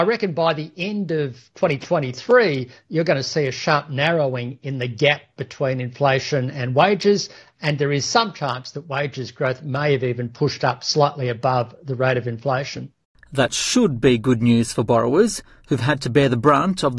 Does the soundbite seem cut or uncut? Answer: uncut